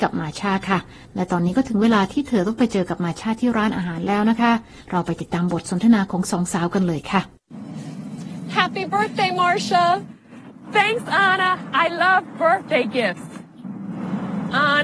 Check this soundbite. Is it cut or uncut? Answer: uncut